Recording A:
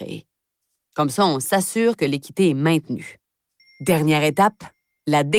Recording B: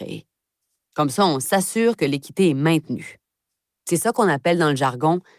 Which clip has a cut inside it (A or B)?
A